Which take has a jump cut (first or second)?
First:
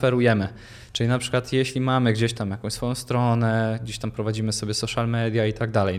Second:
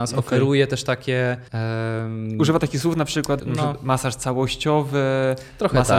second